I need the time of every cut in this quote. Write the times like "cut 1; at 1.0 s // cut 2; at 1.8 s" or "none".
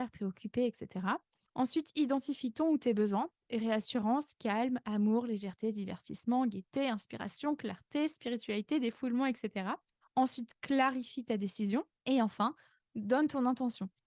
cut 1; at 10.0 s // cut 2; at 12.0 s